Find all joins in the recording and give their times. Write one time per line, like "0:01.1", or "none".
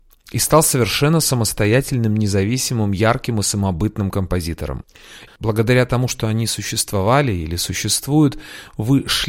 0:05.3